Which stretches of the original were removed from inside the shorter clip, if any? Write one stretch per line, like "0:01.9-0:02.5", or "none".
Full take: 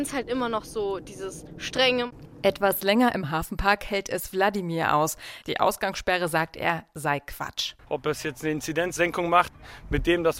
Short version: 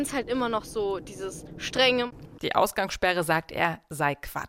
0:02.4-0:05.4